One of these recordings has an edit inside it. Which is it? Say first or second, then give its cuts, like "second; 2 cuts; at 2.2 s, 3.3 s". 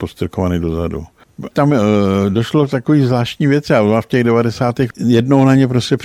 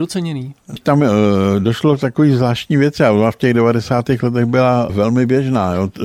first; 2 cuts; at 1.5 s, 4.9 s